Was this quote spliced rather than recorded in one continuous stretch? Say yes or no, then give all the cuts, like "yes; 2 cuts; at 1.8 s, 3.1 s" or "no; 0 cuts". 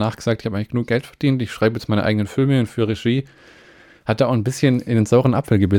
no; 0 cuts